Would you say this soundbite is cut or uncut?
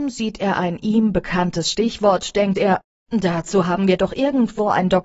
uncut